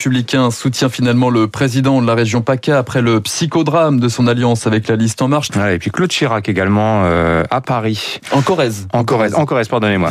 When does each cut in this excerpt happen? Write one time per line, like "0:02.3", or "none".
0:05.5